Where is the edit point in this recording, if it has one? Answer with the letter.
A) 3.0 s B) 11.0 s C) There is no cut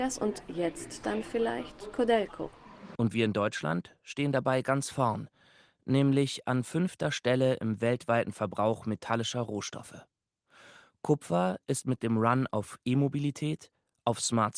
A